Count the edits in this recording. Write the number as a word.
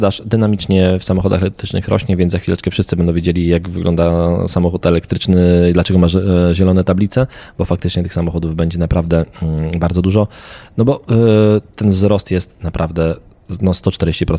zero